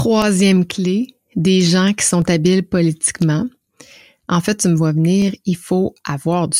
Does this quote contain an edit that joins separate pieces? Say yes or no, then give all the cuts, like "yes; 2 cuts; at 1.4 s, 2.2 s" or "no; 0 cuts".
no; 0 cuts